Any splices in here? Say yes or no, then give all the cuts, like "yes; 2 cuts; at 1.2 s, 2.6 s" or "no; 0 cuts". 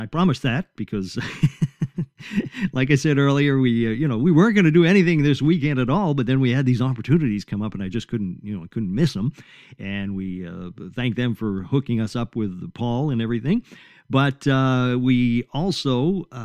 no; 0 cuts